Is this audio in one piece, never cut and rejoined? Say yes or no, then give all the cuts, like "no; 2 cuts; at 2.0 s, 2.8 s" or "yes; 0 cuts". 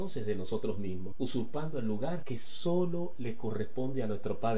yes; 0 cuts